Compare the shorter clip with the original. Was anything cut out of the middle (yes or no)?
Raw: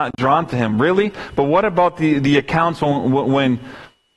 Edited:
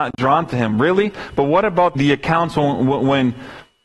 yes